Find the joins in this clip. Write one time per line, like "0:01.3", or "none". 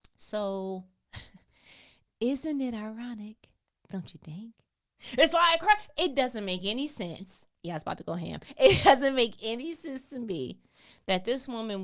none

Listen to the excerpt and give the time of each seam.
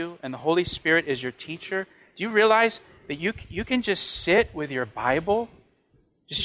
none

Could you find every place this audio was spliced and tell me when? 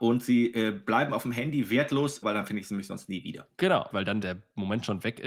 0:02.2
0:03.9

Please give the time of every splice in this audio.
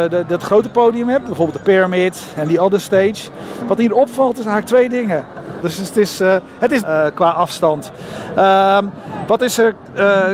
0:05.6
0:06.8

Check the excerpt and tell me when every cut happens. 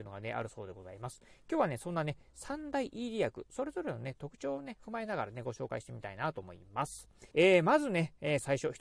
0:07.3

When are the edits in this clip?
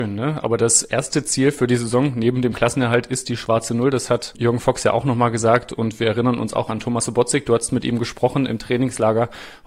none

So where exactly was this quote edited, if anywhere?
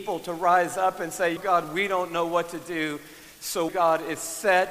0:01.4
0:03.7

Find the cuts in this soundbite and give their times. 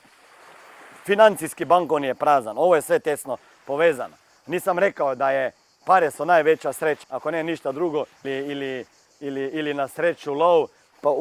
0:07.0
0:08.2

